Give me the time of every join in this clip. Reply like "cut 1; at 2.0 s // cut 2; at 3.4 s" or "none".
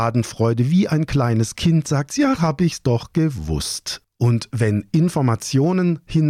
cut 1; at 2.4 s

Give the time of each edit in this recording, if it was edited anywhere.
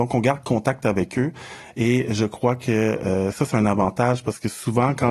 none

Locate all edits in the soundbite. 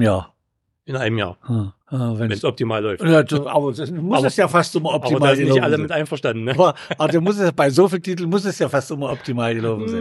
cut 1; at 1.8 s

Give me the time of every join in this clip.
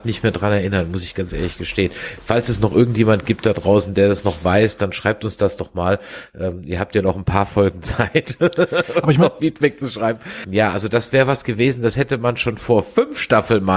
cut 1; at 10.4 s

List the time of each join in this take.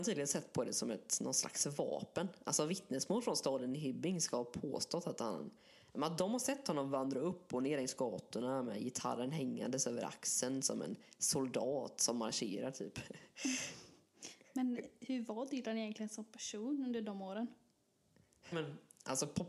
cut 1; at 18.5 s

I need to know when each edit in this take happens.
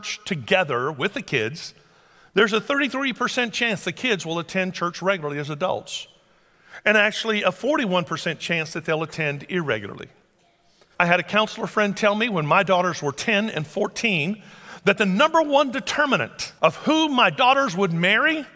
cut 1; at 10.9 s // cut 2; at 16.6 s

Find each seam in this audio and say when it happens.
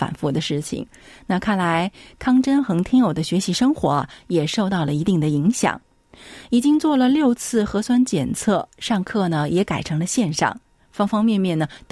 none

